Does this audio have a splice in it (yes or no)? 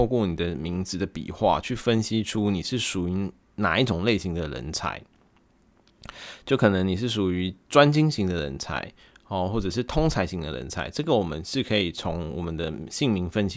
no